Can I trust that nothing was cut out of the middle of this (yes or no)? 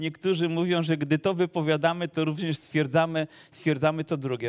yes